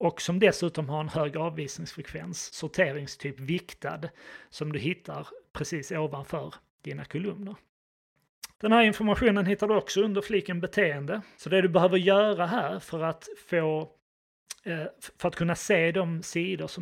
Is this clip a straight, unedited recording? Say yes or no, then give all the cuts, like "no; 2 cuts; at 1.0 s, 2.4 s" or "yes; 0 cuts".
no; 3 cuts; at 2.5 s, 8.5 s, 11.3 s